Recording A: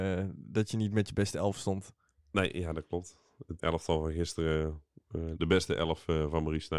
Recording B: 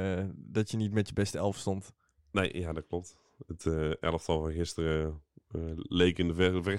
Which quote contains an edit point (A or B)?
A